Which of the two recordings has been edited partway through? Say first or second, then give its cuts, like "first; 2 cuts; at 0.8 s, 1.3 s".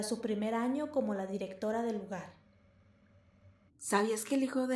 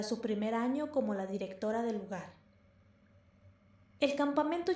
first; 1 cut; at 3.7 s